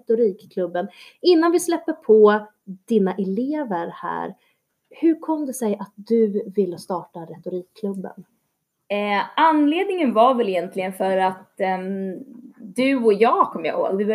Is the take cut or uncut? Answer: uncut